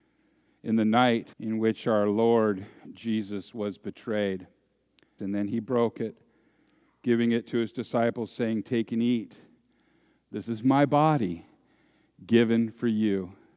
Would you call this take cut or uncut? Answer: cut